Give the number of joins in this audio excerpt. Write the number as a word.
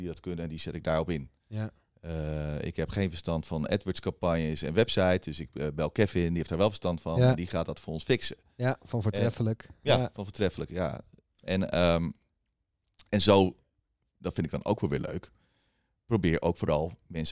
zero